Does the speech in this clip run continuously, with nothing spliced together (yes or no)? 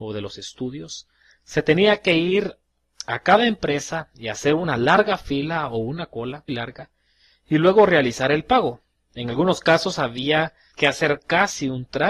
no